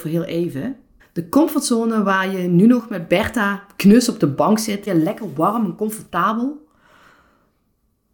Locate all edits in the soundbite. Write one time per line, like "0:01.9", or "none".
0:01.0
0:04.9